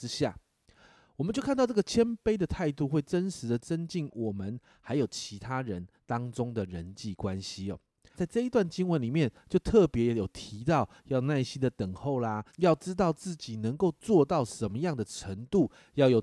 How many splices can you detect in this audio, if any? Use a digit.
2